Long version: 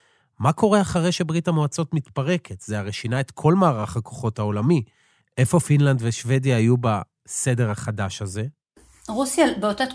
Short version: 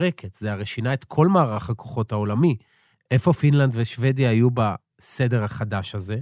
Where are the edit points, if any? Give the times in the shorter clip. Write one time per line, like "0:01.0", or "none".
none